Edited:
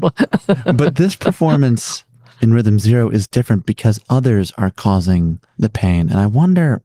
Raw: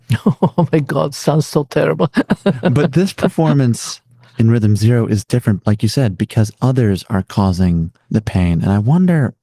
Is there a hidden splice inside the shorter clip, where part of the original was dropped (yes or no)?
yes